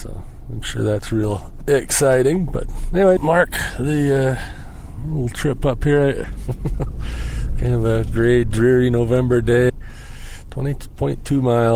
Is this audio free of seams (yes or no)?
no